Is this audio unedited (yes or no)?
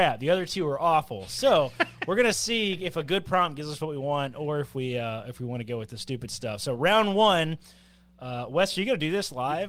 yes